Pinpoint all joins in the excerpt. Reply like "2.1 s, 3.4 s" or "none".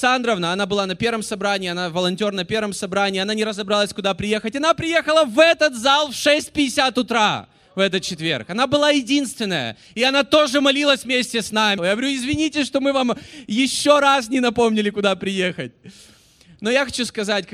11.8 s